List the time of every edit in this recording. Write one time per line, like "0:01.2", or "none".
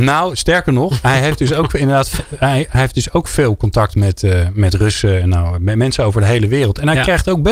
none